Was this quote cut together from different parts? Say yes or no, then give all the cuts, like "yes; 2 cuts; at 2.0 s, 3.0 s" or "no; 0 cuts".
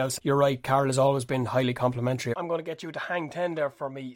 no; 0 cuts